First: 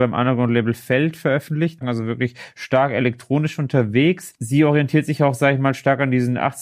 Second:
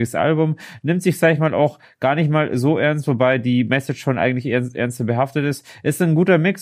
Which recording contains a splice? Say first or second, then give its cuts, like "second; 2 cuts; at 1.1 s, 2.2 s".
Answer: first; 1 cut; at 1.8 s